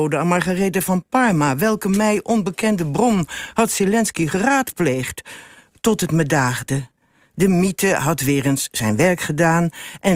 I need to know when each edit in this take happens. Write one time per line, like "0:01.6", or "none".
none